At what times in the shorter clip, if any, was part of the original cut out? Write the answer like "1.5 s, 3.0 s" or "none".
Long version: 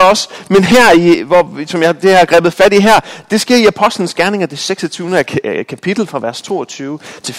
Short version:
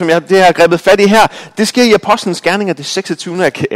none